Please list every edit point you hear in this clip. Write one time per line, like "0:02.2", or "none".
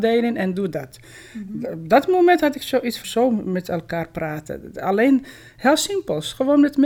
0:03.0